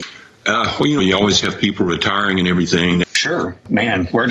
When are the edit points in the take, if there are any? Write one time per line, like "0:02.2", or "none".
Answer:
0:01.0
0:03.0